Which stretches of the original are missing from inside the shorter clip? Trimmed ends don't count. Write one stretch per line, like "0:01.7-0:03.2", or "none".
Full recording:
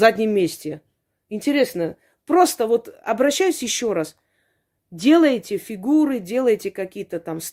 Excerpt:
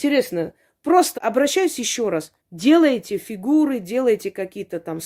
0:02.6-0:03.0
0:04.2-0:04.8